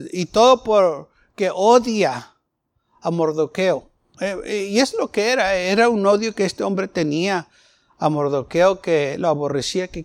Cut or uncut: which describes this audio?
uncut